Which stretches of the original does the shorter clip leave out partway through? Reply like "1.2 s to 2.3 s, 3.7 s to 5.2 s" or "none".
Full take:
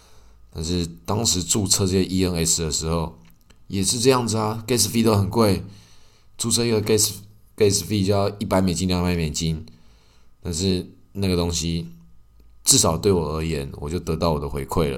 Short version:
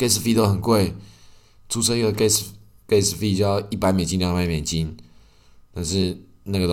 none

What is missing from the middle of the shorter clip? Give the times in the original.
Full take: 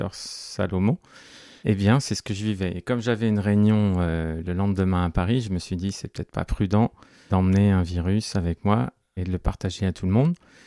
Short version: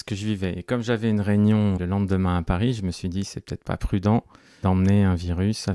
3.9 s to 4.4 s

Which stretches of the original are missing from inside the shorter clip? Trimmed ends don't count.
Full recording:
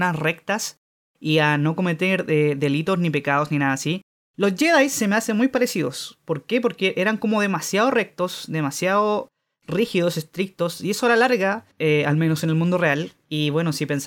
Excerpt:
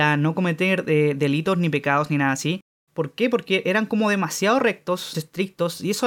4.3 s to 6.2 s, 8.5 s to 10.1 s

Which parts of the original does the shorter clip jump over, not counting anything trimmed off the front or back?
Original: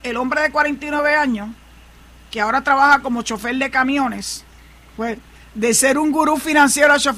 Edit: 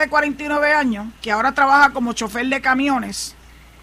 1.6 s to 2.3 s

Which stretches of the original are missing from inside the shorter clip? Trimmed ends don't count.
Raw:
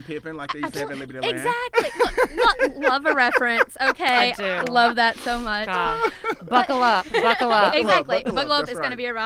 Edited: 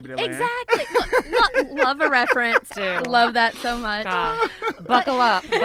3.8 s to 4.3 s

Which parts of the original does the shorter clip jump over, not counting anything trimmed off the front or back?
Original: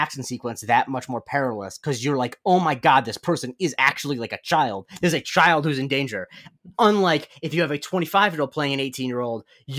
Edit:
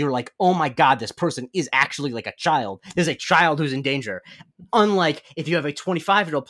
none

